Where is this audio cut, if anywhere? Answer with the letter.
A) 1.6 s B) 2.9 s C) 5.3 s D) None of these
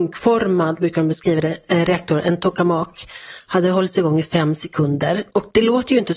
D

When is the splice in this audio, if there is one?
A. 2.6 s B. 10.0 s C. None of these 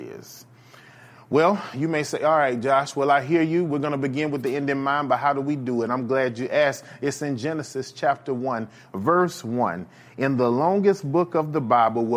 C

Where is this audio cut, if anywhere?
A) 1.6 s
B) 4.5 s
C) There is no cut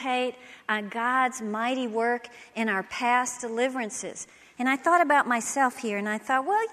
B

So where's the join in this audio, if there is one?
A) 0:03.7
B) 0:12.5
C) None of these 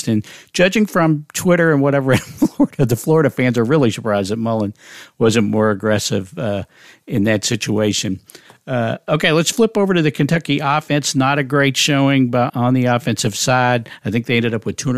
B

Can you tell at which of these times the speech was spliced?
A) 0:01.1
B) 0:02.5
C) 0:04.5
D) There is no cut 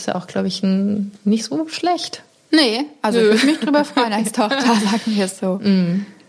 D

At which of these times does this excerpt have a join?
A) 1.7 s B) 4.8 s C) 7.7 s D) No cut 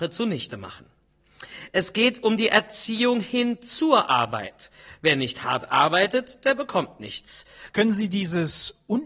C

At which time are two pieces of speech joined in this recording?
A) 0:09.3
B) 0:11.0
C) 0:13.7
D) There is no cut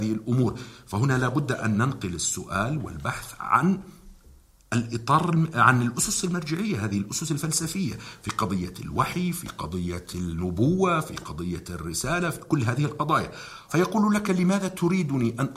C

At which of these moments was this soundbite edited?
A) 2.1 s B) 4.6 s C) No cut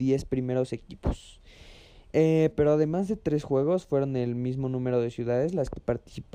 A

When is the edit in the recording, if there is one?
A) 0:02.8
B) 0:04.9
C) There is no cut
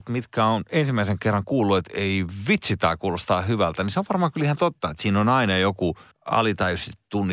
C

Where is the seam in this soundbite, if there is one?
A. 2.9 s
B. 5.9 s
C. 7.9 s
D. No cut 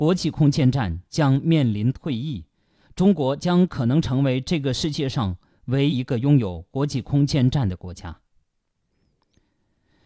B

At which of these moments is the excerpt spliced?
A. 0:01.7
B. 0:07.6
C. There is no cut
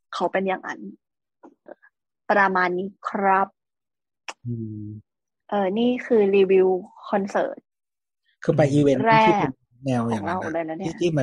A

